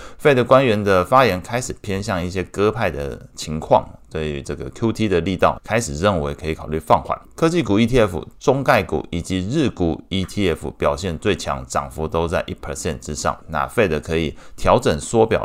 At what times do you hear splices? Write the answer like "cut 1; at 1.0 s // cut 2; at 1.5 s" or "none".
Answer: cut 1; at 5.6 s // cut 2; at 7.2 s // cut 3; at 13.4 s